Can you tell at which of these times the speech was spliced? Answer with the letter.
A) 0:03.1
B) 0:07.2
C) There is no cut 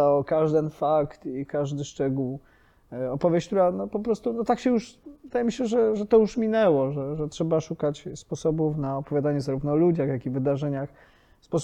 C